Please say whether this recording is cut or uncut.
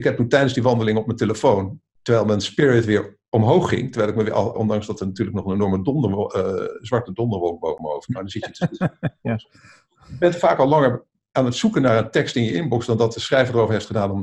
cut